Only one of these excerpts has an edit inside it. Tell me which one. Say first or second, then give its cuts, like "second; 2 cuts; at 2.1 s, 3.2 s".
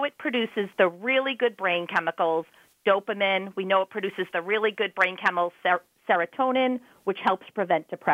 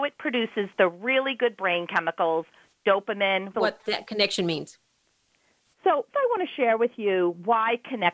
second; 2 cuts; at 3.5 s, 6.1 s